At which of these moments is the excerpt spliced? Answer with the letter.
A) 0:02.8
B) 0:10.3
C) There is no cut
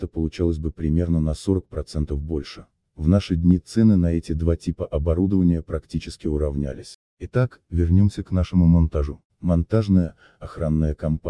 C